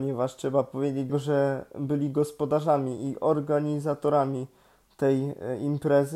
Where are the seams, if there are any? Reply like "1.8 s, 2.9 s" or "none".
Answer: 1.1 s

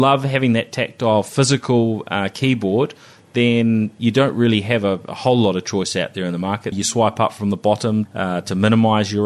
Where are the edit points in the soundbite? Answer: 6.7 s, 8.0 s

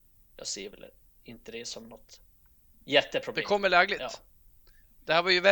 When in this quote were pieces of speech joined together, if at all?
none

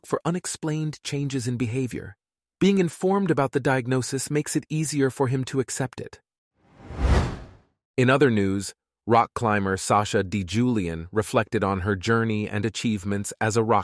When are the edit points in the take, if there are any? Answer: none

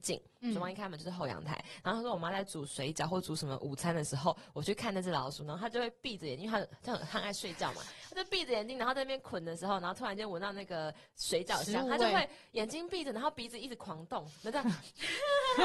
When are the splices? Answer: none

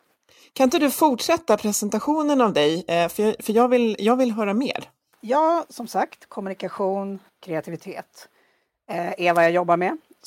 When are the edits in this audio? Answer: 5.1 s, 7.3 s

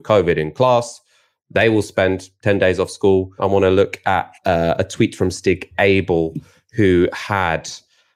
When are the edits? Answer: 3.4 s

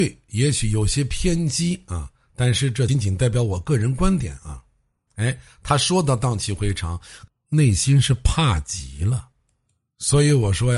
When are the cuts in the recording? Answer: 2.9 s, 5.1 s, 7.3 s

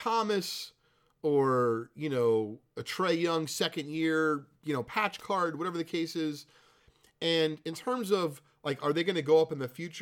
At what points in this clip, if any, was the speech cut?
none

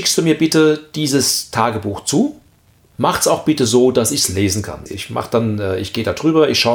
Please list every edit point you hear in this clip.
2.9 s, 4.9 s

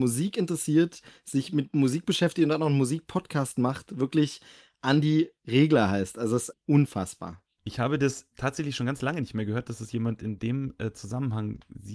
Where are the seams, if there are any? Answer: 6.5 s, 8.3 s

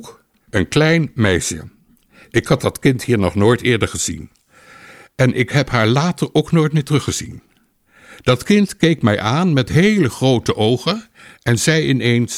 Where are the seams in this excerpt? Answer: none

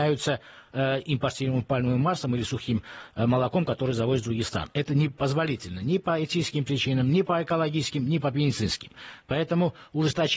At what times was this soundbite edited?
7.1 s

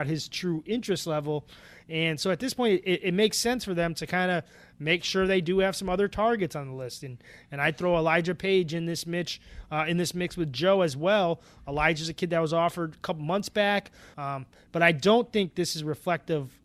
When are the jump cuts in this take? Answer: 14.1 s

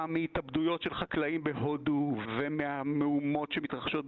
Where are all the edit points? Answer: 2.2 s

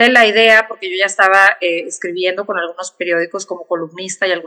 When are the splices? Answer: none

